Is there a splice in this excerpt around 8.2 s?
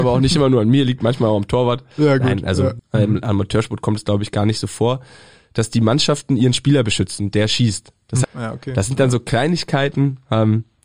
yes; 2 cuts; at 2.8 s, 8.2 s

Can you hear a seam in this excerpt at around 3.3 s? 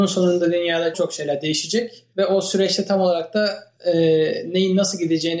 no; 1 cut; at 0.9 s

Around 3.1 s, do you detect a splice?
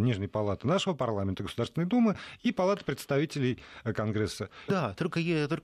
no; 1 cut; at 4.7 s

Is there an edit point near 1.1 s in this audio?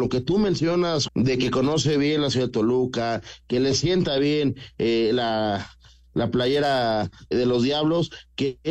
yes; 2 cuts; at 1.1 s, 7.3 s

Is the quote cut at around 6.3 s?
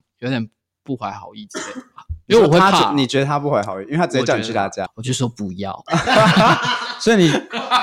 no; 1 cut; at 4.9 s

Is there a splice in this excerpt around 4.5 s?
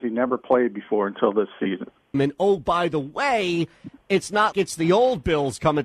yes; 2 cuts; at 2.1 s, 4.5 s

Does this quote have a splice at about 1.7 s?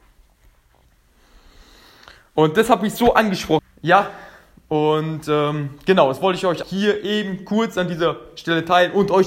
no; 2 cuts; at 3.6 s, 6.6 s

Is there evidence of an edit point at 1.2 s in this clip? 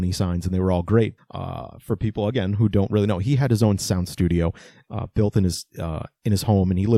yes; 1 cut; at 1.2 s

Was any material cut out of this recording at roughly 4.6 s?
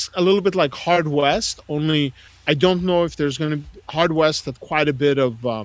no; 0 cuts

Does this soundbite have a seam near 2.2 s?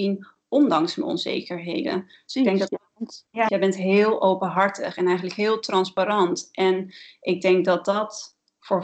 no; 1 cut; at 3.5 s

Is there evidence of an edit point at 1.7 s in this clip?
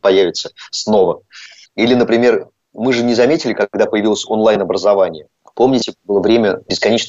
yes; 1 cut; at 1.7 s

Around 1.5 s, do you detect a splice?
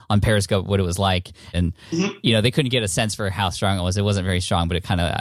yes; 1 cut; at 1.5 s

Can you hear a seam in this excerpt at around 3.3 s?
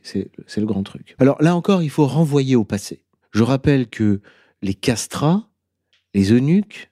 no; 1 cut; at 1.2 s

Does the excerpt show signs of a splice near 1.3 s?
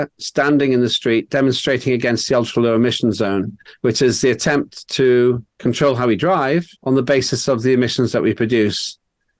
no; 2 cuts; at 5.5 s, 6.8 s

